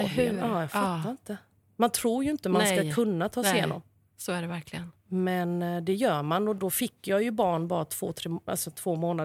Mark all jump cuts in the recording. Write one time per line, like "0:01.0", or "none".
0:06.6